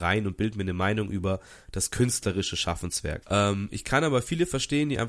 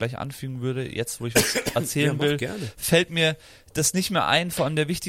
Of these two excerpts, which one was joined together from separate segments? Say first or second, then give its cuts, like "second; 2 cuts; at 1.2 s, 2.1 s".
first; 1 cut; at 3.2 s